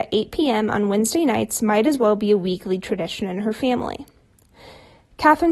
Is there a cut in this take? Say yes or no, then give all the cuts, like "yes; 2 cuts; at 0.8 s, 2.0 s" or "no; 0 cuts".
no; 0 cuts